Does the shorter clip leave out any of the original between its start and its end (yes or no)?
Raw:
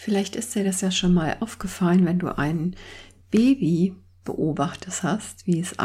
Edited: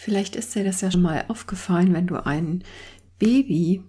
yes